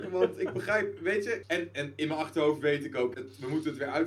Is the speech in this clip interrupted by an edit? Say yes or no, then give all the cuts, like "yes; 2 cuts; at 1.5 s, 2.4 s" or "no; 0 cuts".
yes; 2 cuts; at 1.4 s, 3.1 s